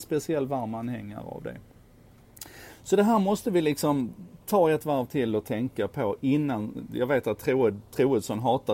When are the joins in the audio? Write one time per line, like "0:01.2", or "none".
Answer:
none